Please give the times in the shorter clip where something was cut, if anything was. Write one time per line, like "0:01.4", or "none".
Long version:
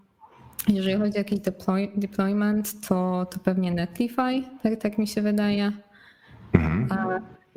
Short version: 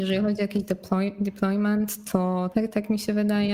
0:02.5